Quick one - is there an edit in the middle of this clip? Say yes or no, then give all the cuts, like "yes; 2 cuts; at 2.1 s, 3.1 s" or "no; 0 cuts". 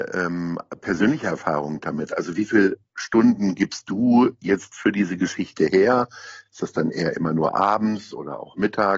no; 0 cuts